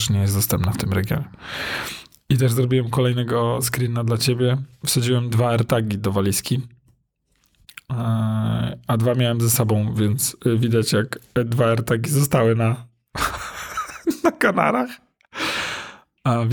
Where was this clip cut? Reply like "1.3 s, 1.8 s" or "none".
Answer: none